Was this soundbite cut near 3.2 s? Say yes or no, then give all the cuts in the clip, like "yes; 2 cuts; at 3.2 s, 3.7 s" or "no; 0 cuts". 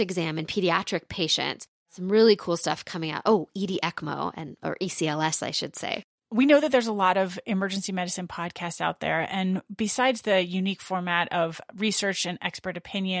no; 0 cuts